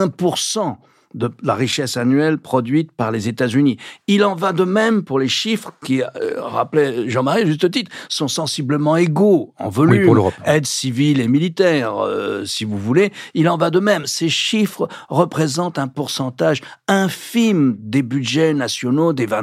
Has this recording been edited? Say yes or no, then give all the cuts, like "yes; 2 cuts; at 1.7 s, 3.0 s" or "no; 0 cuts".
no; 0 cuts